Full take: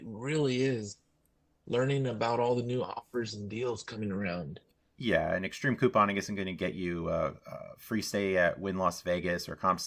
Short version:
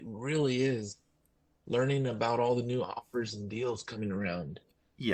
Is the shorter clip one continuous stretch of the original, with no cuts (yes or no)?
yes